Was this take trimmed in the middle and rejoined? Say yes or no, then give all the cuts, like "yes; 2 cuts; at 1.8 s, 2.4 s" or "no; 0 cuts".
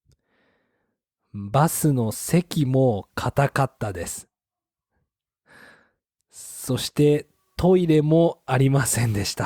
no; 0 cuts